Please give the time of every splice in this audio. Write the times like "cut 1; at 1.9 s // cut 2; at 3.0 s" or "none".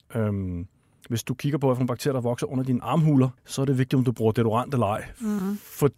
cut 1; at 3.4 s